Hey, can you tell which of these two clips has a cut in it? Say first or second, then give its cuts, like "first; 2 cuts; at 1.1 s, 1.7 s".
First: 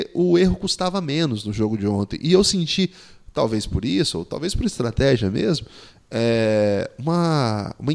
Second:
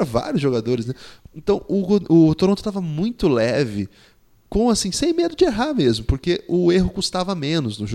second; 1 cut; at 1.2 s